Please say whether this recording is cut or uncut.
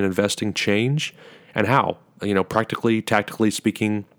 uncut